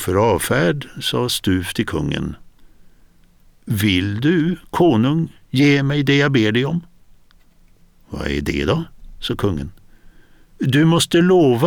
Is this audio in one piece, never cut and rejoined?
yes; 0 cuts

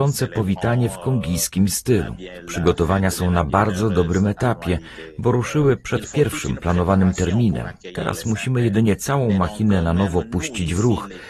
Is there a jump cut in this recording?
no; 0 cuts

